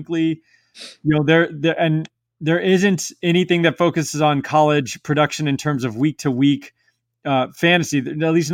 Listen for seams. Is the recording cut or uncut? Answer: uncut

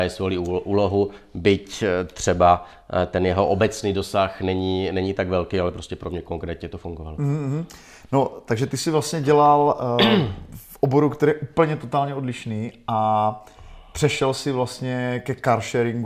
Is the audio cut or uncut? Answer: uncut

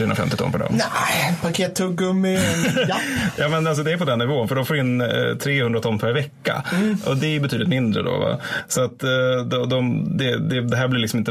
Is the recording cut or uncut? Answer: uncut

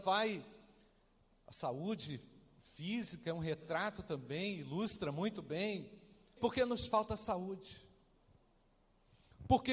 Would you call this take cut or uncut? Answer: cut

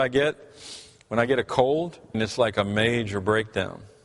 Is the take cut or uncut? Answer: cut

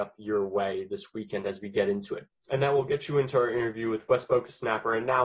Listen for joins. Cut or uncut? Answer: uncut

